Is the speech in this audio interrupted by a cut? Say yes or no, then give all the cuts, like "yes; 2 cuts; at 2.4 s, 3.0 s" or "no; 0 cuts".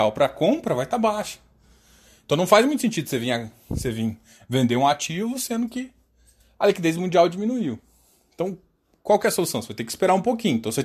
no; 0 cuts